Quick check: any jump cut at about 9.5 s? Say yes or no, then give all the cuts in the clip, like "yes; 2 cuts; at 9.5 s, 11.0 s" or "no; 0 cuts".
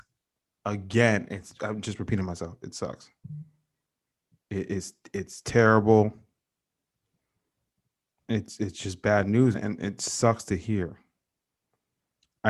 yes; 1 cut; at 9.5 s